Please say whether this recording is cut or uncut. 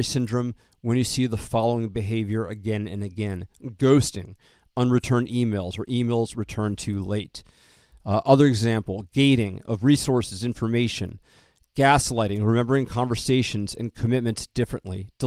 uncut